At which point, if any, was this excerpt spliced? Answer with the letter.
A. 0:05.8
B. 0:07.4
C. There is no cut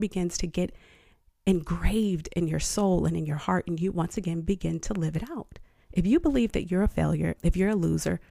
B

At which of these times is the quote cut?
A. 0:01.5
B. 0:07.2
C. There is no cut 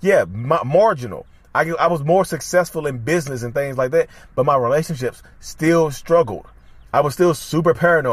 C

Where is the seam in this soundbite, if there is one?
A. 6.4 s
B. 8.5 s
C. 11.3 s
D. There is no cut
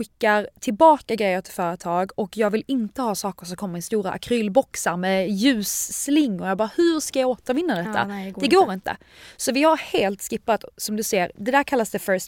C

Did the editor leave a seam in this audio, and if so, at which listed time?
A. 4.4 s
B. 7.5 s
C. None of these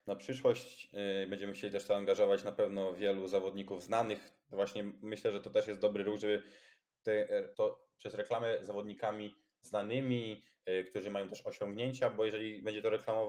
B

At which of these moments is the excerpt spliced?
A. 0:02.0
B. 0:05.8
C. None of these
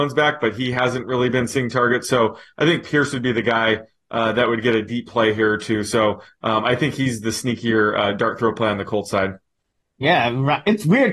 C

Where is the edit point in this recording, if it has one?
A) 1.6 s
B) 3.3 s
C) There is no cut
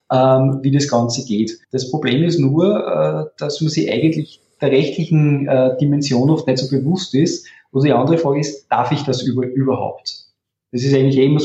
A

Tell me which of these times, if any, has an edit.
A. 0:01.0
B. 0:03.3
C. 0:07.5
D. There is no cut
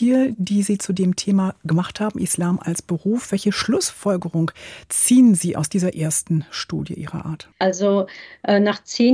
C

